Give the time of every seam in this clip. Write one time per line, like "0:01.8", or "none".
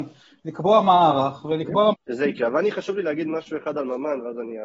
0:01.9